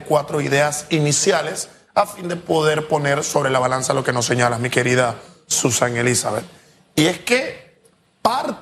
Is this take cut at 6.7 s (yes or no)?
no